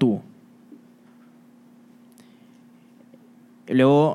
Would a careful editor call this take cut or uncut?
uncut